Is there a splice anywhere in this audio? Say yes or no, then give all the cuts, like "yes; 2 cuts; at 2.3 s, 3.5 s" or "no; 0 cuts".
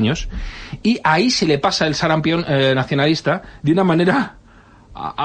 no; 0 cuts